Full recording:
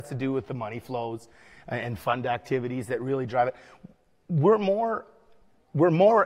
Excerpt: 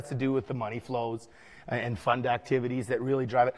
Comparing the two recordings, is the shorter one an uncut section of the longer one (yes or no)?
yes